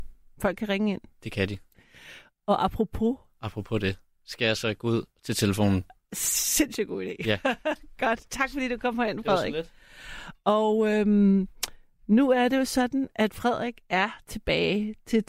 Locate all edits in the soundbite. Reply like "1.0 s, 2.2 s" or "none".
none